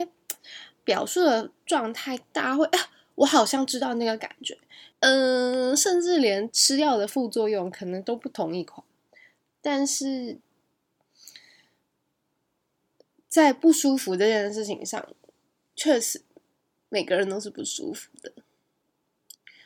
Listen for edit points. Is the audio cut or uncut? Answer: cut